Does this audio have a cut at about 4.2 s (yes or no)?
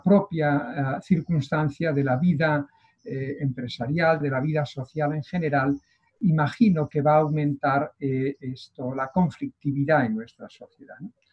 yes